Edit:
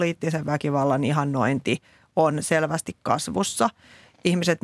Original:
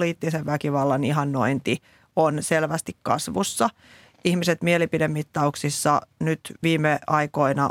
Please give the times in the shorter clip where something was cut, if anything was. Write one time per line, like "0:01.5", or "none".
none